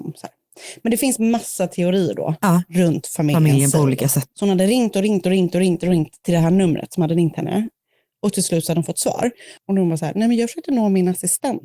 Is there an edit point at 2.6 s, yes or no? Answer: no